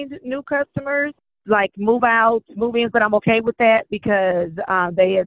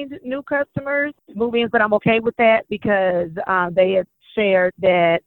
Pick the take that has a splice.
second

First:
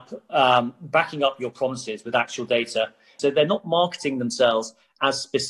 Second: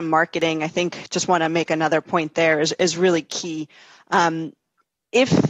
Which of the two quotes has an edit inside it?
first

